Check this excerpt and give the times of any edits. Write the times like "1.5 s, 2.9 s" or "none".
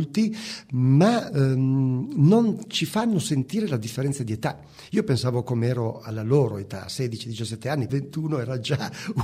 7.9 s